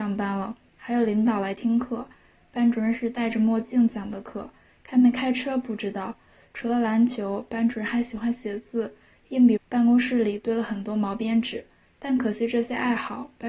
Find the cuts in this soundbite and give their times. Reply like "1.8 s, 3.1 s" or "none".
9.6 s